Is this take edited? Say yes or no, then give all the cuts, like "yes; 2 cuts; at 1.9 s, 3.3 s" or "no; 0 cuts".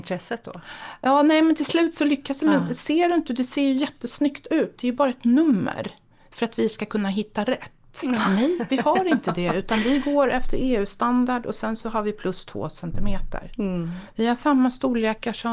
yes; 1 cut; at 8.0 s